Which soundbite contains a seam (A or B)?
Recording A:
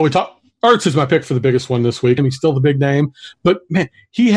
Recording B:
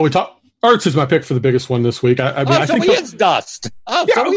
A